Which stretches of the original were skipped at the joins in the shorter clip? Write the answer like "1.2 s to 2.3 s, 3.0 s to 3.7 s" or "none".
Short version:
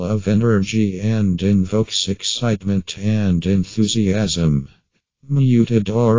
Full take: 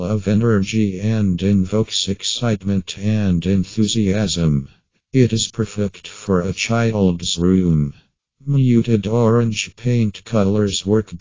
5.1 s to 8.2 s